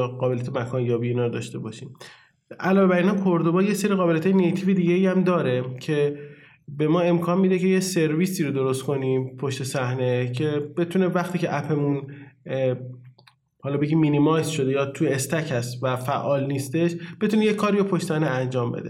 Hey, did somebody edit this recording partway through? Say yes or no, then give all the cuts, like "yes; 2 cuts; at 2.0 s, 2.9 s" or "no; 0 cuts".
no; 0 cuts